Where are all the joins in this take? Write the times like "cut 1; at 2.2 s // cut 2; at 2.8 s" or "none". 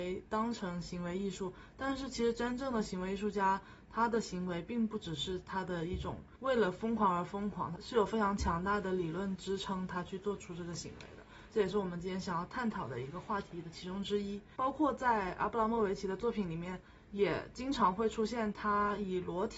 none